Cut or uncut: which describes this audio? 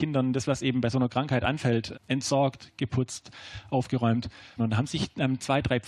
cut